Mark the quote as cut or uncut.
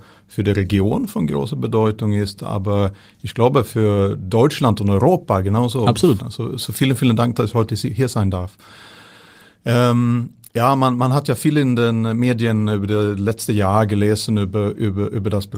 cut